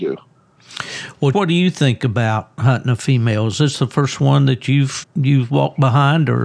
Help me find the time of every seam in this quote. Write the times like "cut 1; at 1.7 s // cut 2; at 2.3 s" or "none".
cut 1; at 1.3 s // cut 2; at 5.0 s